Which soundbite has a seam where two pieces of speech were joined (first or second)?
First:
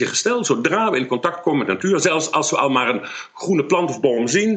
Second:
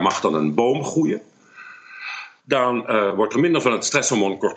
second